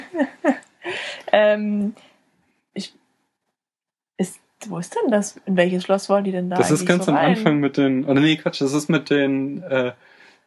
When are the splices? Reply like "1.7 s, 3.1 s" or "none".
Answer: none